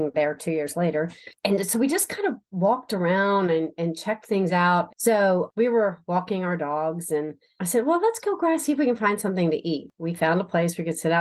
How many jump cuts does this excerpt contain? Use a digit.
1